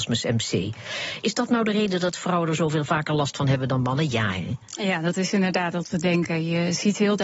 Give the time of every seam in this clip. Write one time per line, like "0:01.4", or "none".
0:01.2